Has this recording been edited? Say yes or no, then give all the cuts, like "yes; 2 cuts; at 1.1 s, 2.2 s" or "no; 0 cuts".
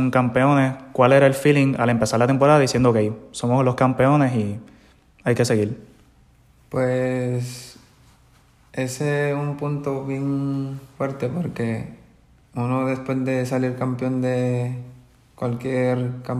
no; 0 cuts